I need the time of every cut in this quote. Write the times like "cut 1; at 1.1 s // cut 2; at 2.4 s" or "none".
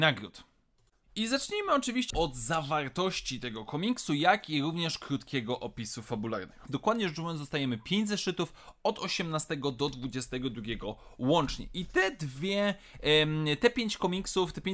cut 1; at 2.1 s // cut 2; at 6.7 s